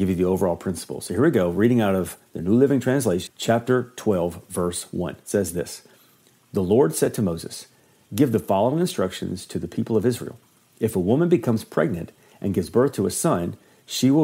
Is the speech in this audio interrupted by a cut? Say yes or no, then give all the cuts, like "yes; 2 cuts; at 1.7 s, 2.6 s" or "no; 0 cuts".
yes; 1 cut; at 3.3 s